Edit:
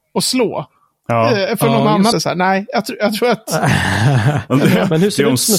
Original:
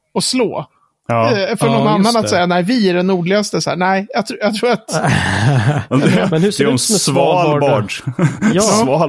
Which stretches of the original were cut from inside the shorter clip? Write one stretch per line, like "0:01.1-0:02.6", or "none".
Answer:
0:02.1-0:03.5